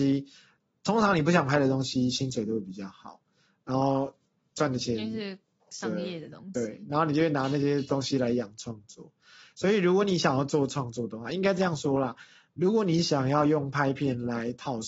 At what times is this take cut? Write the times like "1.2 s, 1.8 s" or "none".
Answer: none

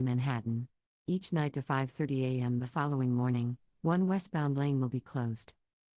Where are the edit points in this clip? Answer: 1.1 s

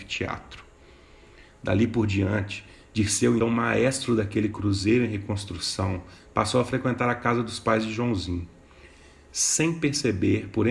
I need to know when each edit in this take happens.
3.4 s, 6.2 s

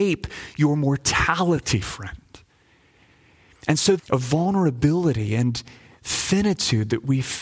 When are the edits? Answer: 4.0 s

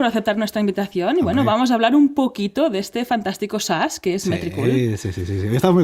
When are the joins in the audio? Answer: none

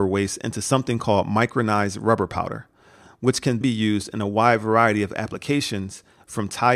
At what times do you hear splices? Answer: 3.6 s

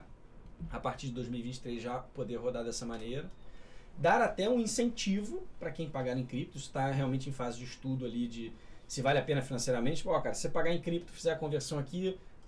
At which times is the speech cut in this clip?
none

